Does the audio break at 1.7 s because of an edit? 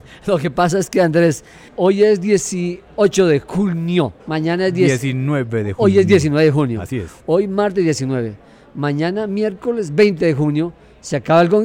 yes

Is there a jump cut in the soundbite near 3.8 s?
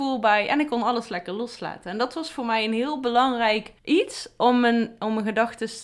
yes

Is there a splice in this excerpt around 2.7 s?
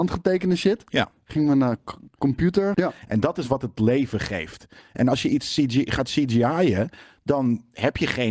yes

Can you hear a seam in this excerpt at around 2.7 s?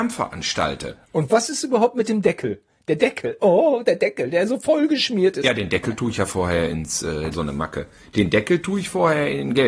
no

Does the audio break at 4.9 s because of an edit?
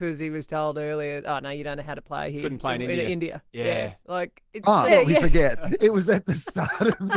yes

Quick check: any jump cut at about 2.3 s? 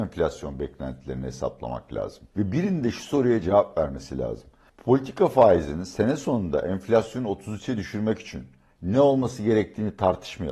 yes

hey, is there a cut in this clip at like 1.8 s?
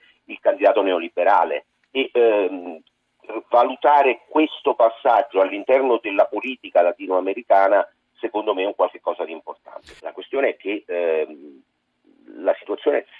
no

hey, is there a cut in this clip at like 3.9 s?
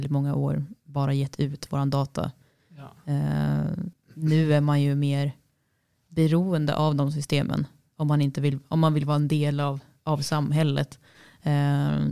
yes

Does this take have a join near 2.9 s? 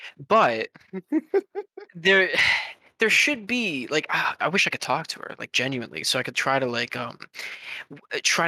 no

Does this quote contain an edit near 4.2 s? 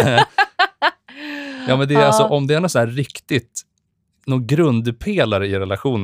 yes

